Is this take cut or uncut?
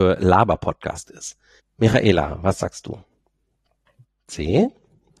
cut